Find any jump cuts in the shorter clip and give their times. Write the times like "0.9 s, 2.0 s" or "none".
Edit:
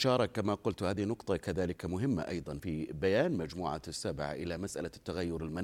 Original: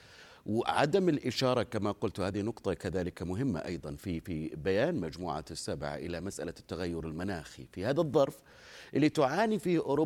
2.6 s